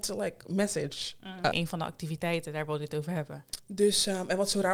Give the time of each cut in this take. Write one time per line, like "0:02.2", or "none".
0:01.5
0:03.6